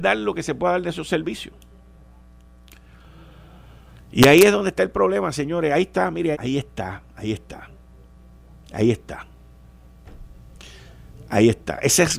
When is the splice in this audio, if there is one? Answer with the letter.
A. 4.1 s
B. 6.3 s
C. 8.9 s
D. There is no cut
B